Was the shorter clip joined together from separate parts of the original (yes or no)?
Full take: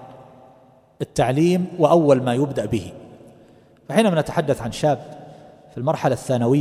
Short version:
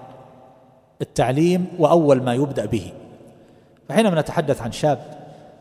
no